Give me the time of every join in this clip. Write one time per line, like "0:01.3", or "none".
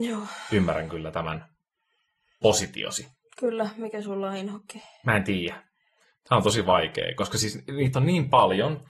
none